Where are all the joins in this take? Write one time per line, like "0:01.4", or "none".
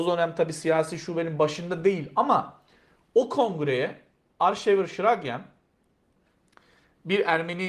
none